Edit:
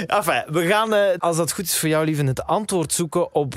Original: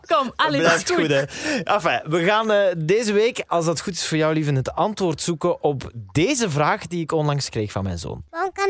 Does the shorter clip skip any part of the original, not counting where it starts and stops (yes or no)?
yes